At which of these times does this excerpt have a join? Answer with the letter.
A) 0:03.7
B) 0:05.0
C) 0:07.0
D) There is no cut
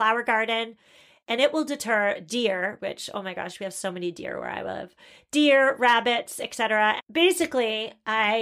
C